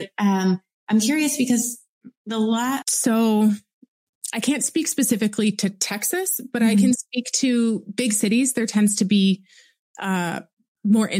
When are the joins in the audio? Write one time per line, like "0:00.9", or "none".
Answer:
0:02.8

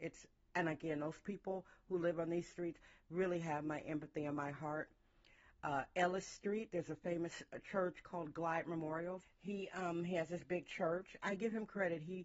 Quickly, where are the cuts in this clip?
0:09.2

